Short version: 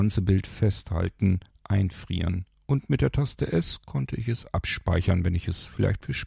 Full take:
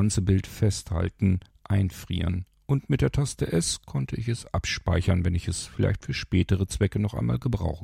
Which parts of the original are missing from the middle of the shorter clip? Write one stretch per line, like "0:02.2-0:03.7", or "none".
none